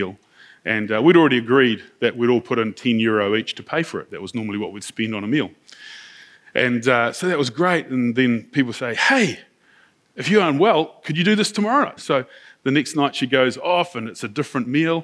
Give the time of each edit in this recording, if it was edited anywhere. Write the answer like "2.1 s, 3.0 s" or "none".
12.0 s